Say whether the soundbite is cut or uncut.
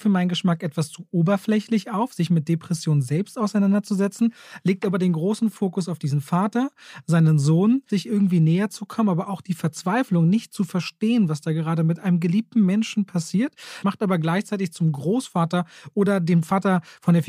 cut